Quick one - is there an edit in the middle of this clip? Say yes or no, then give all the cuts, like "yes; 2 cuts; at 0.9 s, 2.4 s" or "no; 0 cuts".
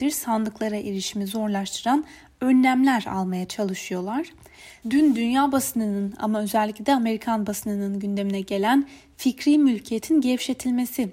yes; 1 cut; at 4.8 s